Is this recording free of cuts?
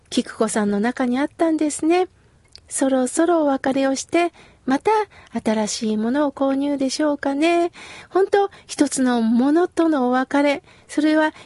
yes; 0 cuts

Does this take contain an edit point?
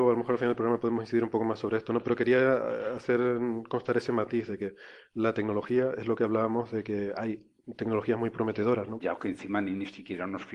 yes; 1 cut; at 9.0 s

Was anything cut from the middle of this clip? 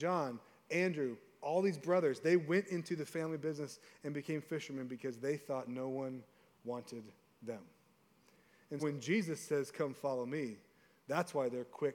yes; 1 cut; at 8.8 s

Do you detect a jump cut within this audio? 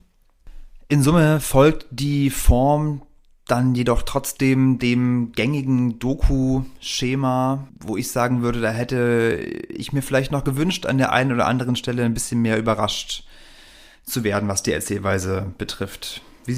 no; 0 cuts

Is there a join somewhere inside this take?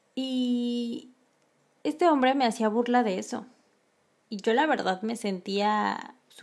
no; 0 cuts

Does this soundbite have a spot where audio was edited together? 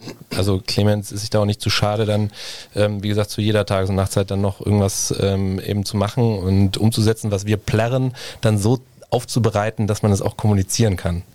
no; 0 cuts

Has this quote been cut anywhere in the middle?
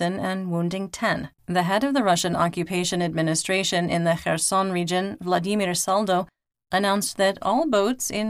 yes; 1 cut; at 1.4 s

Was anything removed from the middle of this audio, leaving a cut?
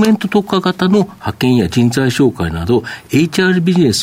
no; 0 cuts

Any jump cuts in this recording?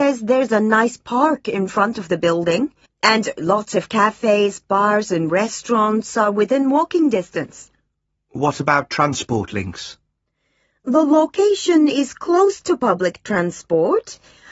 yes; 1 cut; at 2.9 s

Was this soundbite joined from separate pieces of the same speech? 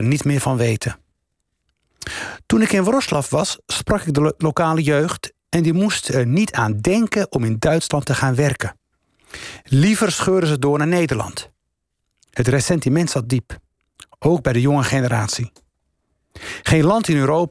no; 0 cuts

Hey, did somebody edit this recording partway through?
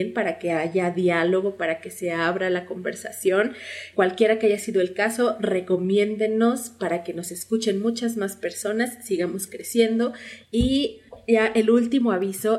yes; 1 cut; at 3.9 s

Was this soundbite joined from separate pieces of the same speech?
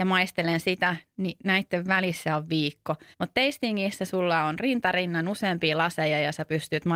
yes; 1 cut; at 3.1 s

